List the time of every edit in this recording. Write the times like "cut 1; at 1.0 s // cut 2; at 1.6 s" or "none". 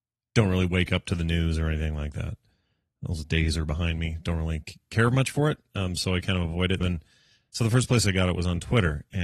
cut 1; at 6.8 s